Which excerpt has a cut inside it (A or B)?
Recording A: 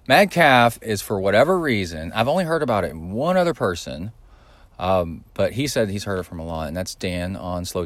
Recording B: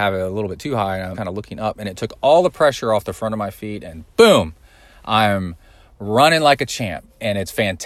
B